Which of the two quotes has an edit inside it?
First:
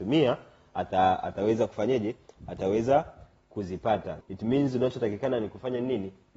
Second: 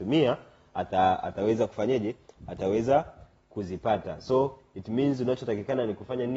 first; 1 cut; at 4.2 s

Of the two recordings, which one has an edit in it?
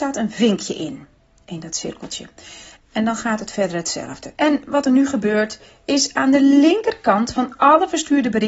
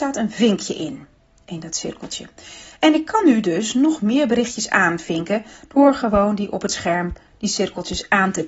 first; 2 cuts; at 2.8 s, 4.4 s

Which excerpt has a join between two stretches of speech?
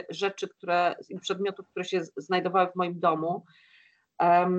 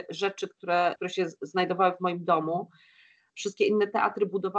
second; 2 cuts; at 1.0 s, 3.3 s

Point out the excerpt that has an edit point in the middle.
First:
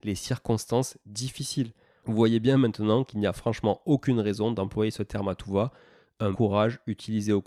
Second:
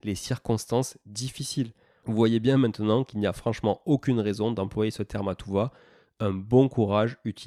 first; 1 cut; at 6.3 s

